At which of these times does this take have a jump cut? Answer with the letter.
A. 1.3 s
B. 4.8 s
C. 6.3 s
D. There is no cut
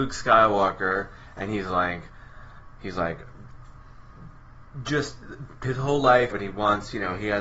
C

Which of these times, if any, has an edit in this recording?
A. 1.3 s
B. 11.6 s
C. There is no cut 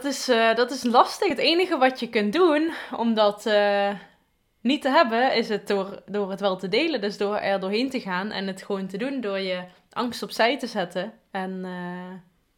C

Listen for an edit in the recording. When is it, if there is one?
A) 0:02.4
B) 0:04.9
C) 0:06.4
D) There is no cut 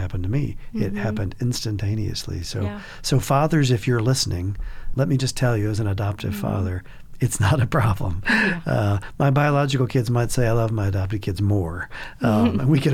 B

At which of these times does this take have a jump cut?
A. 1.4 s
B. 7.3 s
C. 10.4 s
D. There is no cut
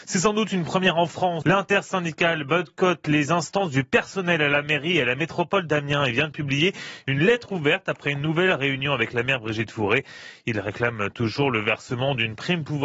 A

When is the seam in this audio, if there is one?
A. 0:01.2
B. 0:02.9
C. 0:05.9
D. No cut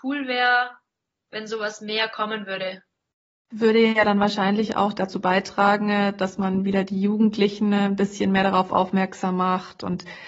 D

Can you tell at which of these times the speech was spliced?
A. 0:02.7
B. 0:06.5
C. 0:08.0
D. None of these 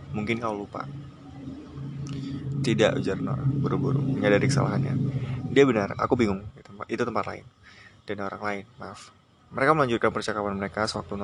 B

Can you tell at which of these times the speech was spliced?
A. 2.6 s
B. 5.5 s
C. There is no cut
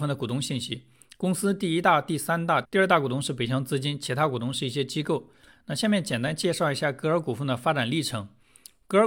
A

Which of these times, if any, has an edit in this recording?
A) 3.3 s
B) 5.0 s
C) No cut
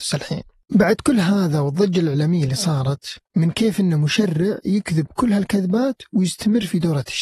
A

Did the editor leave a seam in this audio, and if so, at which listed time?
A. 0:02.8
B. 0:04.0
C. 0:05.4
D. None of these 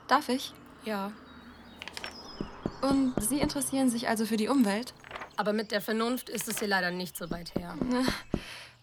C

